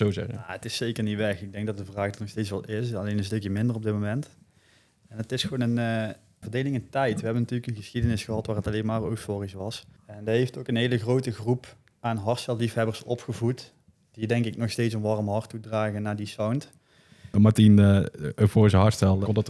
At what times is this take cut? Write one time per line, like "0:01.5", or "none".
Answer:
0:06.4
0:10.0
0:17.3